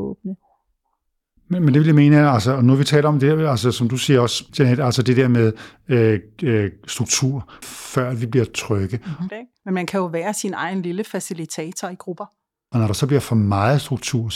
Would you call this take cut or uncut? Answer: cut